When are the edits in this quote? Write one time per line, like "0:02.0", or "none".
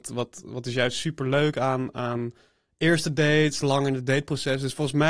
none